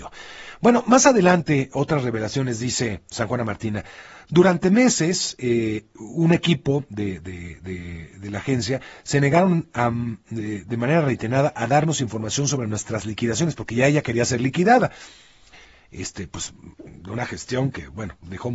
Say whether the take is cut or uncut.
uncut